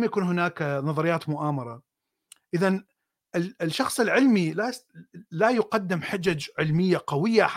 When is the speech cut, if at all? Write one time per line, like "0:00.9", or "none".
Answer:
none